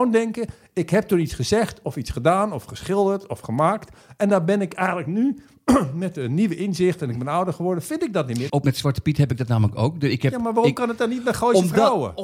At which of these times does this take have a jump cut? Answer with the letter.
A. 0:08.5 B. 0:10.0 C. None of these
A